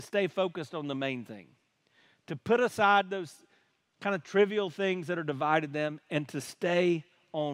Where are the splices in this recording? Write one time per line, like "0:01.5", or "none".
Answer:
none